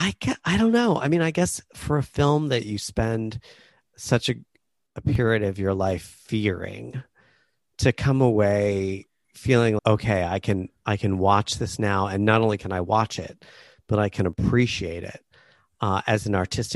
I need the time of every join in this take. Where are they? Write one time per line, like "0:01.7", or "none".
0:09.8